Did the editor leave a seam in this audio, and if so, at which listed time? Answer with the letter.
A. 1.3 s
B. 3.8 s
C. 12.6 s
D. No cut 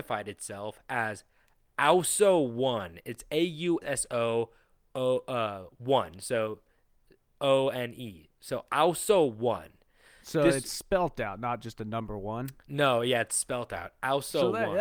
B